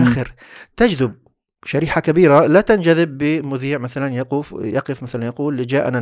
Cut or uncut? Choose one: uncut